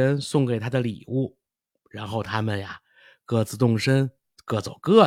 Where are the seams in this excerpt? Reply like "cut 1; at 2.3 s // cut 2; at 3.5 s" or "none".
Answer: none